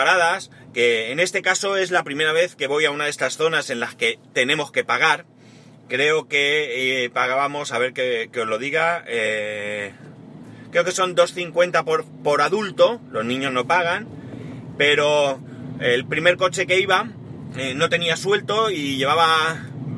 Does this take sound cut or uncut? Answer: uncut